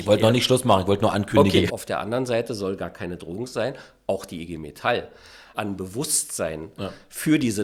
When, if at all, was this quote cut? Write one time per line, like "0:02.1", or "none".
0:01.7
0:05.5

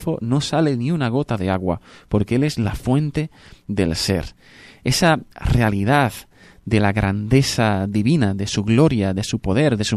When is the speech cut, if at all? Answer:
none

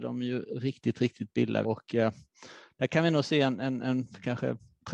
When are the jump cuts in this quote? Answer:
0:01.6

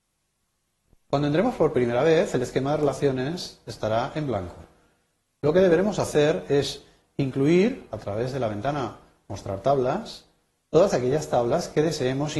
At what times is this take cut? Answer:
none

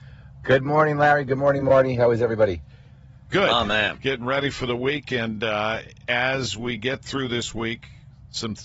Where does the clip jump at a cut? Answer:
none

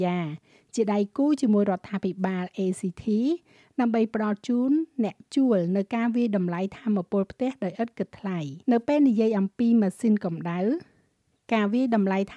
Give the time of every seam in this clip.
0:08.6

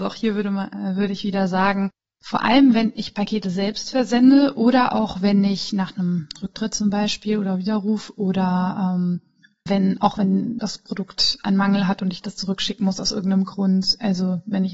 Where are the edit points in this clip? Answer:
none

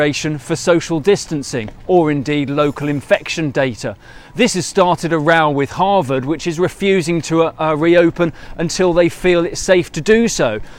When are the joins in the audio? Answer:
none

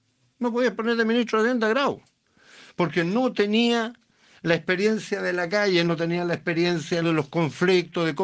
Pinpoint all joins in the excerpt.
0:05.8
0:07.0

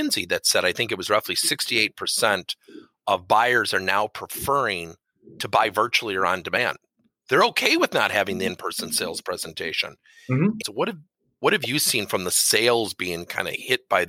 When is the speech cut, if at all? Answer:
0:10.6

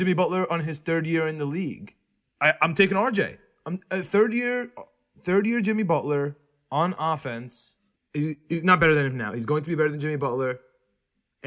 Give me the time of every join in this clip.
0:02.2
0:08.0

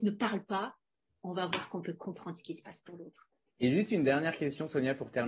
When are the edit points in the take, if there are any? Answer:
0:03.5

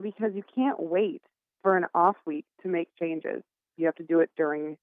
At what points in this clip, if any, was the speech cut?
0:03.7

